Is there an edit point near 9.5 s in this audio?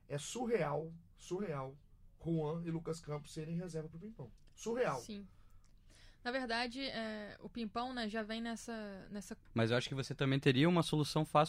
yes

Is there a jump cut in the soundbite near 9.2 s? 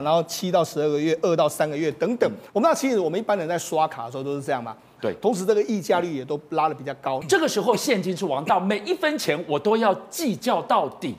no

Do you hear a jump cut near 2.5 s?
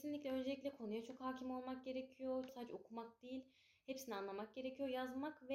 yes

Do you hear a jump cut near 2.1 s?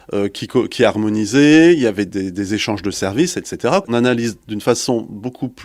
yes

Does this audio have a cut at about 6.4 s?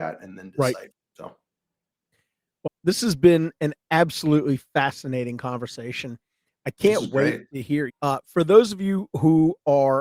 no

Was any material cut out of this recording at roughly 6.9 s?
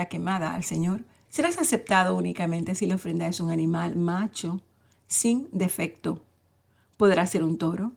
no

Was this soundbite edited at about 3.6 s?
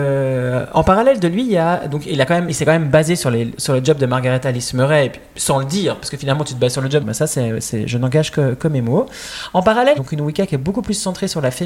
no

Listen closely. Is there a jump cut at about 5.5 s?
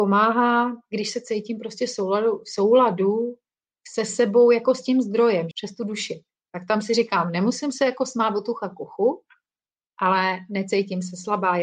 yes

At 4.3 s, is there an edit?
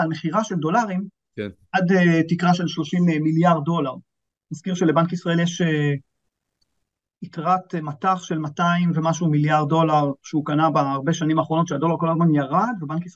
no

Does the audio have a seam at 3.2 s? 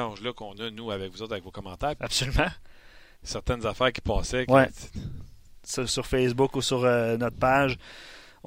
yes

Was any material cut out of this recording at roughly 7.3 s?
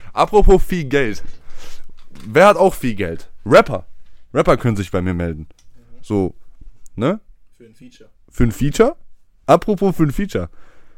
no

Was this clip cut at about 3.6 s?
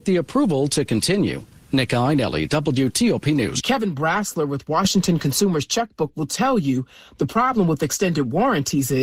yes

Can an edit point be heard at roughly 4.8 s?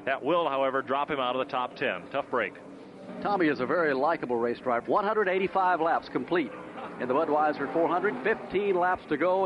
yes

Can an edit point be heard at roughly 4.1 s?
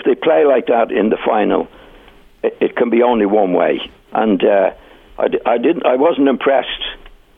yes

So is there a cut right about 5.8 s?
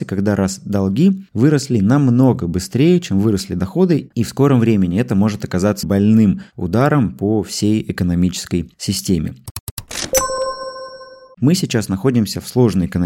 yes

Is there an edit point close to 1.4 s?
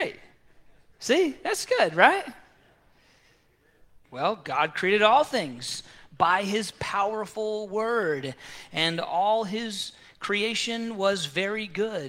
no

